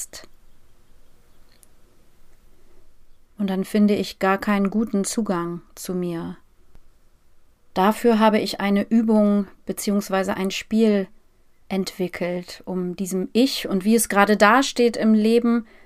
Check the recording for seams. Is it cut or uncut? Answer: cut